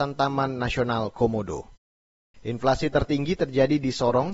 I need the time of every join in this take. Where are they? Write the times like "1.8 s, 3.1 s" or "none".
2.3 s

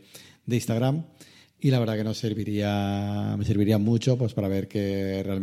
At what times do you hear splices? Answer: none

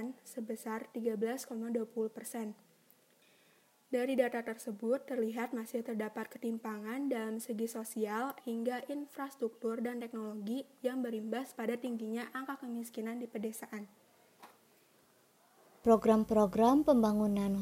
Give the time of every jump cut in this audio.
8.4 s

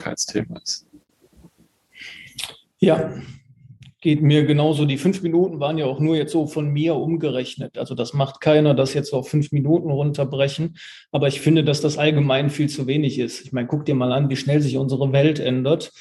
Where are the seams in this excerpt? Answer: none

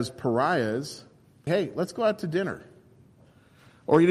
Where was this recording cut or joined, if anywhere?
1.5 s

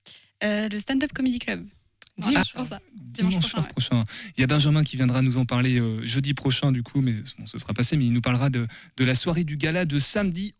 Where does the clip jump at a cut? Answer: 2.4 s

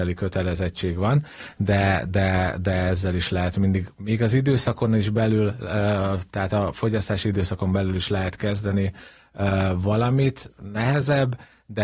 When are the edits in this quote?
none

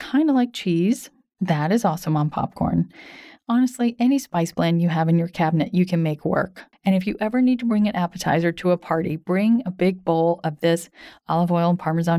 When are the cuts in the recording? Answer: 6.7 s

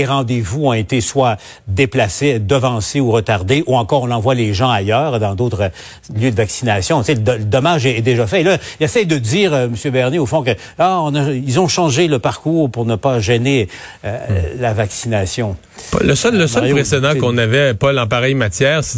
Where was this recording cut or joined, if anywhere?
none

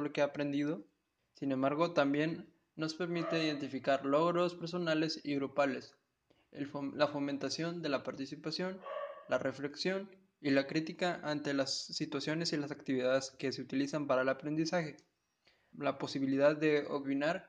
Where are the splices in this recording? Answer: 1.2 s, 15.7 s

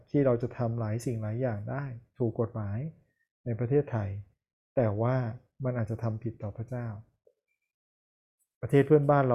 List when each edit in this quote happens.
none

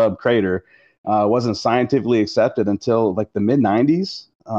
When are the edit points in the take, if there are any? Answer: none

